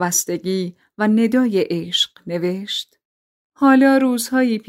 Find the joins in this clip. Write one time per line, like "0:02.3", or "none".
none